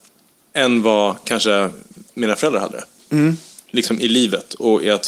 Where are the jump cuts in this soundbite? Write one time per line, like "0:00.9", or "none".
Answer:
none